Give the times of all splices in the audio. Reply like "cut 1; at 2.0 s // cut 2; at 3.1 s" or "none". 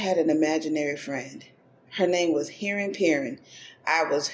none